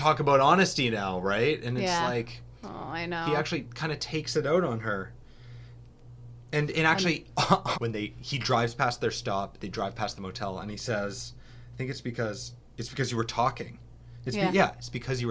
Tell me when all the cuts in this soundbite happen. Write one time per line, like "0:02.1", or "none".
0:07.7